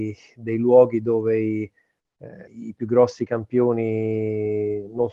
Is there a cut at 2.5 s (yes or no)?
yes